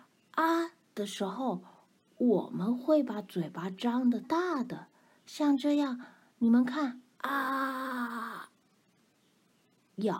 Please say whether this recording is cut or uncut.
cut